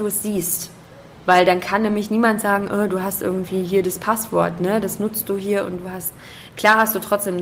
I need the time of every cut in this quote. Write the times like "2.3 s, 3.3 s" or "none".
1.1 s